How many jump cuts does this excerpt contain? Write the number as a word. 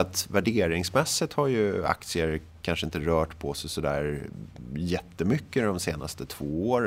zero